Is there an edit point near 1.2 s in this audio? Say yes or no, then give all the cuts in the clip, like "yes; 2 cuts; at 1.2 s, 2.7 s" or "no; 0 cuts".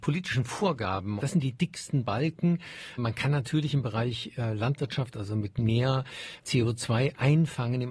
yes; 1 cut; at 1.2 s